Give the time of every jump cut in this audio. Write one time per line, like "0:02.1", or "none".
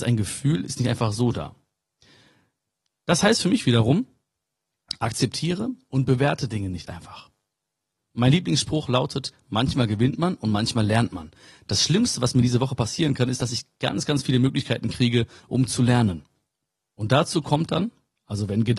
none